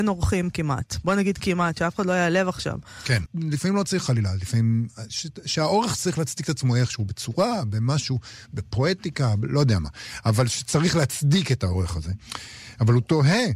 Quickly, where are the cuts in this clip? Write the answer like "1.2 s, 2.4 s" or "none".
3.3 s